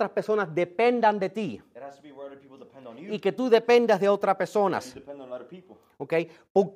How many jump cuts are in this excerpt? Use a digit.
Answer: 0